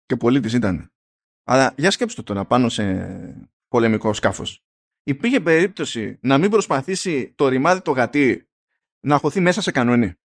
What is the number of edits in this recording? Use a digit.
0